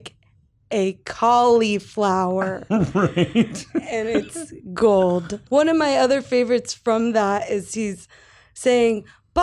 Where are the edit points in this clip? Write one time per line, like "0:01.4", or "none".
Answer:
0:05.5